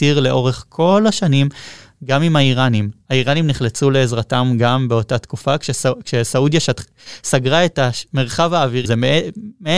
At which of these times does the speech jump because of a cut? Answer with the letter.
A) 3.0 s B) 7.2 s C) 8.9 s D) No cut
C